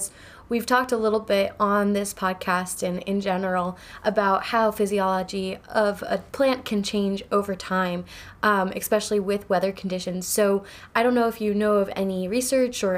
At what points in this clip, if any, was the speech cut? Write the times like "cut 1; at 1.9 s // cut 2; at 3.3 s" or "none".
cut 1; at 6.3 s